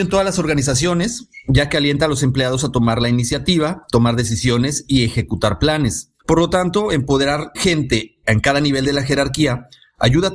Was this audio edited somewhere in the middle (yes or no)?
yes